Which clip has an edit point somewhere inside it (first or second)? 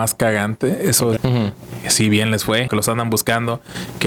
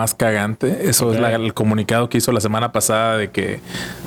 first